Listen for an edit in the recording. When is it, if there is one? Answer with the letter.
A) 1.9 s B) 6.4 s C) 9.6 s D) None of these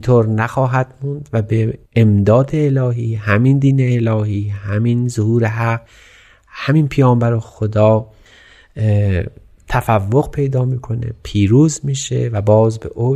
A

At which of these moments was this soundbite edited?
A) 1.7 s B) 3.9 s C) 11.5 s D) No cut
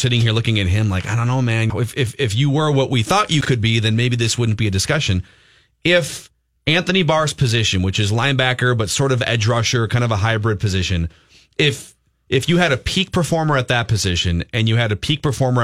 A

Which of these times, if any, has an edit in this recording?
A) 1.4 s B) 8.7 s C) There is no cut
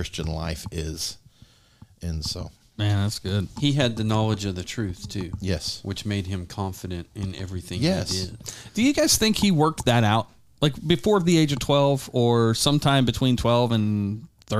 C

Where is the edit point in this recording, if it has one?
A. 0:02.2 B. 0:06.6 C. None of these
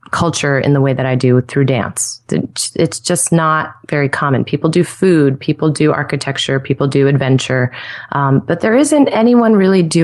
C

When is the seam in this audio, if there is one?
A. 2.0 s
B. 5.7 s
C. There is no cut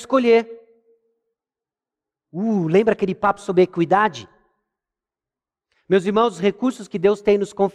B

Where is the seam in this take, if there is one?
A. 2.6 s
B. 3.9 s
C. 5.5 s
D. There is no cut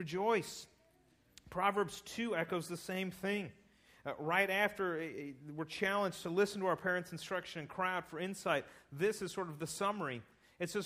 D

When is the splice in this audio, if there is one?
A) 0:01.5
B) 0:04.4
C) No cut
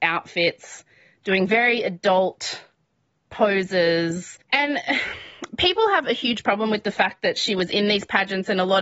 B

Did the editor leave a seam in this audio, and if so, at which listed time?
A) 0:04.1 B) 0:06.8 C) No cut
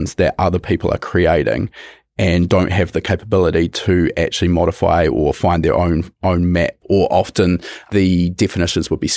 B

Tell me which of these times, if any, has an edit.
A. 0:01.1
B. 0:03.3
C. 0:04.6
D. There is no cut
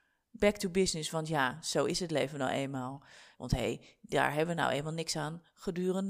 B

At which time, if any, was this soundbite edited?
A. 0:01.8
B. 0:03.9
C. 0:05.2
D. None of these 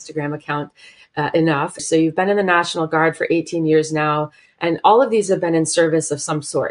A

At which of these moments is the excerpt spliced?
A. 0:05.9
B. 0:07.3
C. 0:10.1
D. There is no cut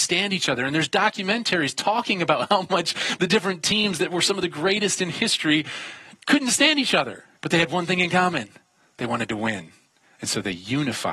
B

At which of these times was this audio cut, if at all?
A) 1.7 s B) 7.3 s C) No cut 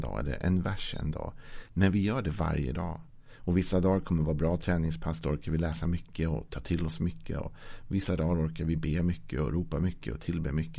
A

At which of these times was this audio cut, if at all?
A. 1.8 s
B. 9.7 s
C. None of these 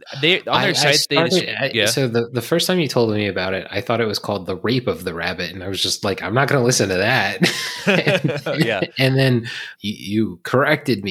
B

